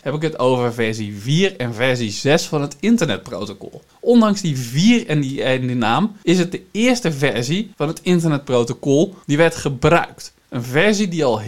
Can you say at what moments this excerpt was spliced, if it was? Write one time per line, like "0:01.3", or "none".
none